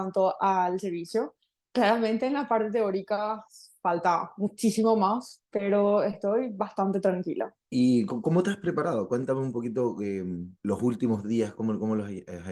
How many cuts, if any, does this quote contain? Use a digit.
1